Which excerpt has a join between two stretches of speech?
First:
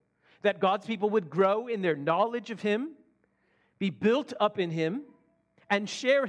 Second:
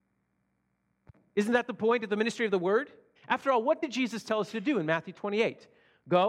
second; 1 cut; at 3.2 s

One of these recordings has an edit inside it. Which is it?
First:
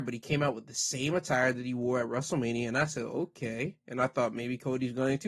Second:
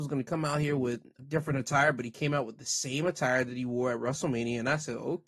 second; 1 cut; at 1.2 s

